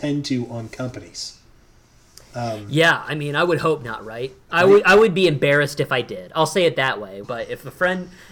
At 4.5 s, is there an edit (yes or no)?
yes